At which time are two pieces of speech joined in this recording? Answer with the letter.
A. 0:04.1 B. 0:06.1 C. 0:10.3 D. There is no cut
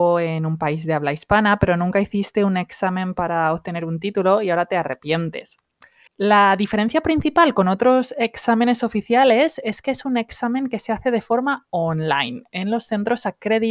B